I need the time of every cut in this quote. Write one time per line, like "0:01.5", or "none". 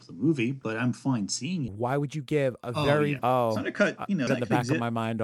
0:01.7
0:03.2
0:04.3